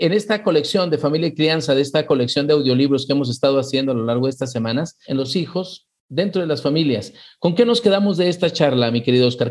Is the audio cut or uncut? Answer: cut